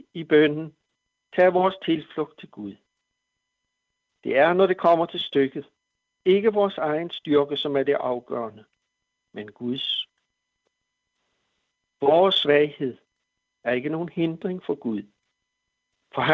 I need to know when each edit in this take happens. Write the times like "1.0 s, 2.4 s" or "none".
none